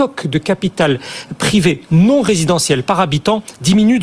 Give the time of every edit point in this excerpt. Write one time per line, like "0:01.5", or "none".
none